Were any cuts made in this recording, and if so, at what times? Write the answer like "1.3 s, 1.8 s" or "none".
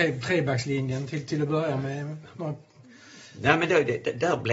none